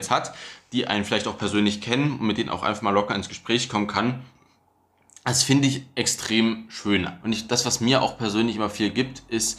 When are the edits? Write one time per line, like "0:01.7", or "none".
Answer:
0:07.2